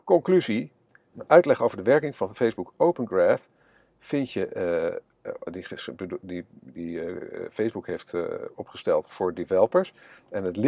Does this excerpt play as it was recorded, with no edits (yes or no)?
no